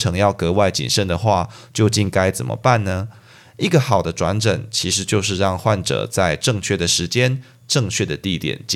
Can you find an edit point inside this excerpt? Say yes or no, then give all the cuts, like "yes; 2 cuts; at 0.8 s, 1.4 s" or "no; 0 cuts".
no; 0 cuts